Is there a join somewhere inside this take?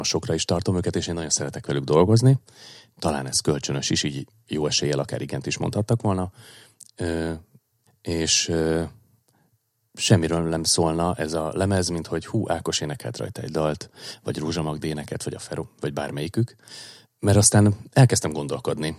yes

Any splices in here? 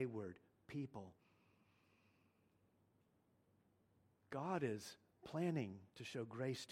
no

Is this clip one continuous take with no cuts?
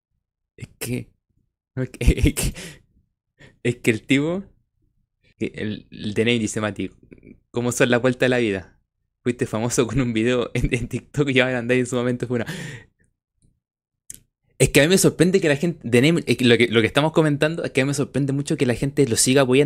yes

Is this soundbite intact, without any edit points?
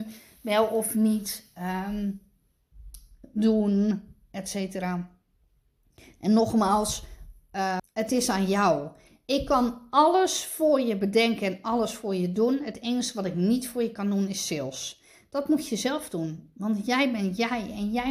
no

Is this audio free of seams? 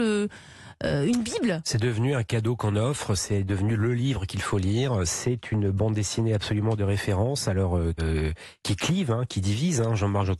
no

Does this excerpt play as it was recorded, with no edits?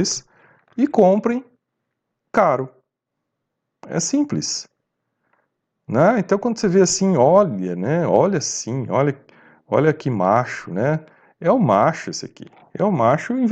yes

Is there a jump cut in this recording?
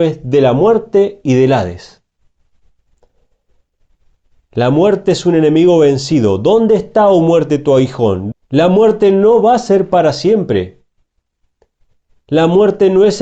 yes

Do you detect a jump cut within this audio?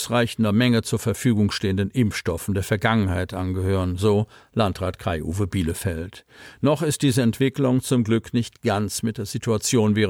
no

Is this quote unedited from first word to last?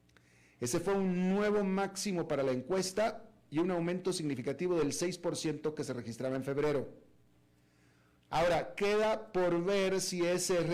no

